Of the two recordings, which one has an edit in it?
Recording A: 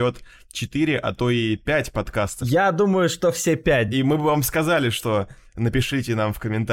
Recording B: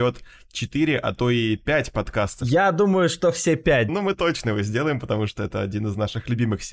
B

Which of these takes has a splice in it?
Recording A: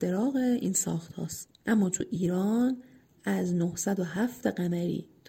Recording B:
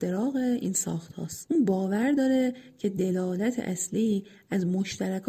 A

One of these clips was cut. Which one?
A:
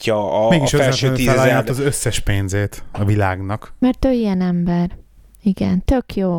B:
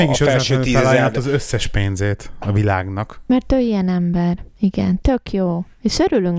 B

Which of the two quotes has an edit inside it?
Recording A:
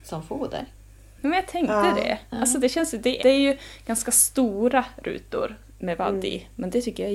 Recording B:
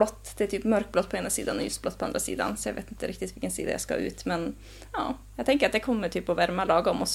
A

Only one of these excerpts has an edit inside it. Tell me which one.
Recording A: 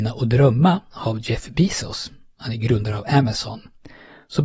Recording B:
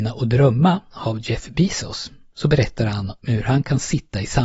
B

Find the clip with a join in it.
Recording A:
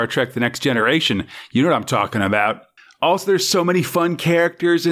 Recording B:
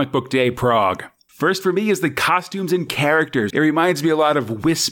B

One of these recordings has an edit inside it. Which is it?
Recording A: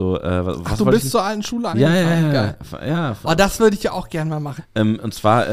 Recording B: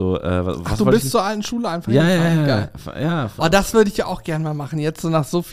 A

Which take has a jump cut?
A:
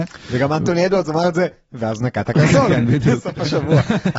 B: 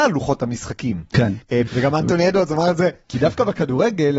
B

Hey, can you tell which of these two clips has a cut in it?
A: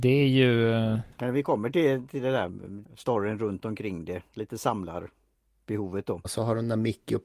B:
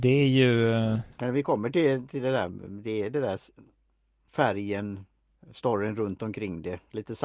A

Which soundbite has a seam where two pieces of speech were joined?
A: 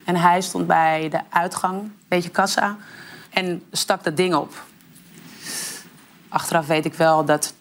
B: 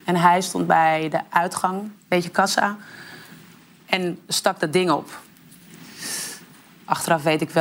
A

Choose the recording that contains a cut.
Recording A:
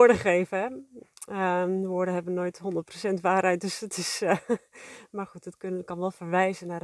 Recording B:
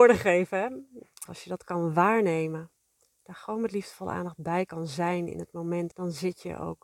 B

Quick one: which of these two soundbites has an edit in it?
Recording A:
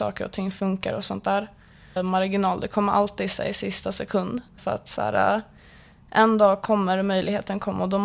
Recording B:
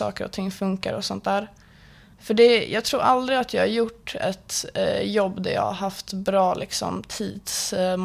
A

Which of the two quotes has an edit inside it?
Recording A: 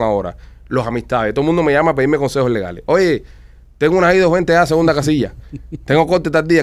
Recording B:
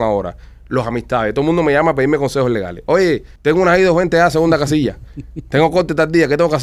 B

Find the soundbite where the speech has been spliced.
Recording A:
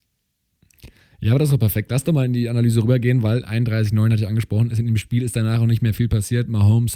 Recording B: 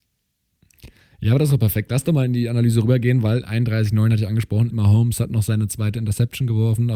B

